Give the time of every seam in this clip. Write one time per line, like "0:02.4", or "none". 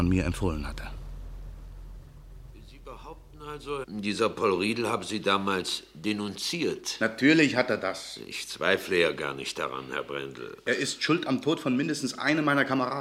0:03.8